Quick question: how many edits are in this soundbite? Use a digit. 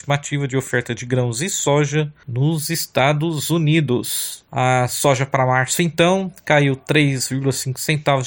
0